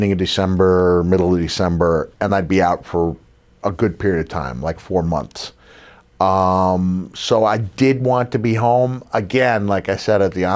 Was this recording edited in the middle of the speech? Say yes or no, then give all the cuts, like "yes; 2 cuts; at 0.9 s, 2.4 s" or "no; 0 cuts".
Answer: no; 0 cuts